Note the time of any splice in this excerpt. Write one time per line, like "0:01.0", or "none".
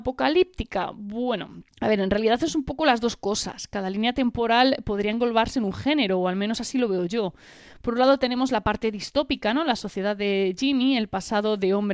0:01.7